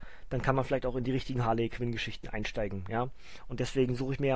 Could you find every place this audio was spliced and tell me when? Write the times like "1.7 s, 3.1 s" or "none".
none

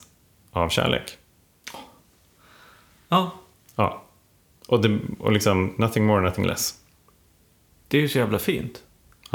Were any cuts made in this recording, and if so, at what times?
none

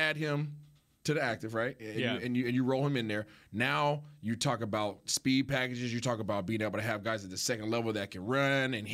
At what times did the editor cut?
none

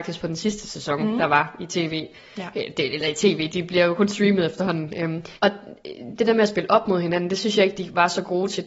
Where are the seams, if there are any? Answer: 5.3 s

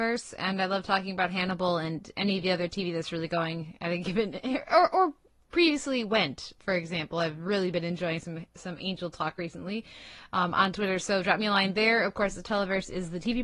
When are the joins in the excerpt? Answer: none

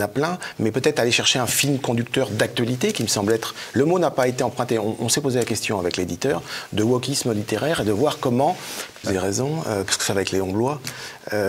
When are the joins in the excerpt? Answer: 9.0 s

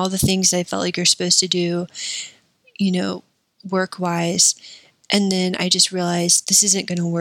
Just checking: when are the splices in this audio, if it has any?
none

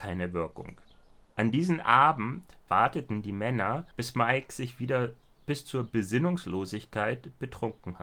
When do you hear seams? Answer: 1.2 s, 3.9 s

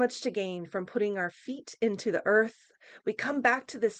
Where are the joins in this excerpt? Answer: none

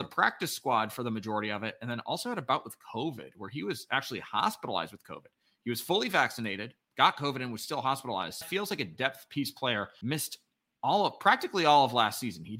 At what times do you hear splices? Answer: 8.4 s, 10.0 s

